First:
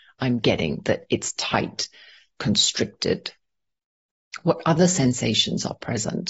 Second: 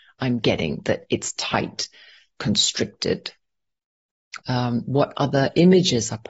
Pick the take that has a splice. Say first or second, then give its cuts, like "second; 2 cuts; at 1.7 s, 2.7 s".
second; 1 cut; at 4.4 s